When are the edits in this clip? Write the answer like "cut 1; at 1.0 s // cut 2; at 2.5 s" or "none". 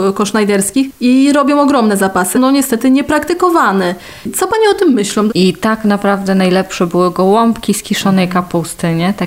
cut 1; at 2.3 s // cut 2; at 5.3 s